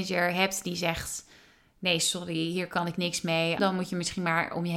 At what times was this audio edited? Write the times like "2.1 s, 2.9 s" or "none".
3.6 s